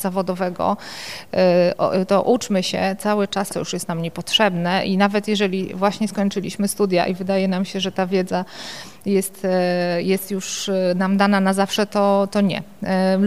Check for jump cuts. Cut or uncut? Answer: cut